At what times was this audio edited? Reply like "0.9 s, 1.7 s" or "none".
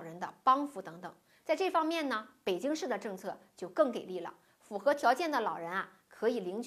none